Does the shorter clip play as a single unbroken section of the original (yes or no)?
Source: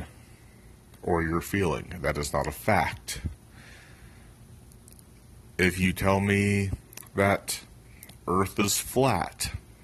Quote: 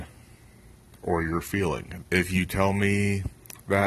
no